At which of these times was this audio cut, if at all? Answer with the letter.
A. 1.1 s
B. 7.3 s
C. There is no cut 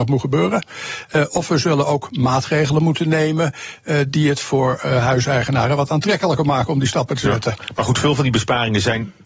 C